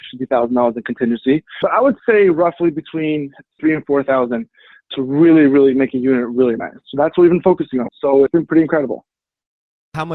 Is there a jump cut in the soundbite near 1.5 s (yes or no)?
no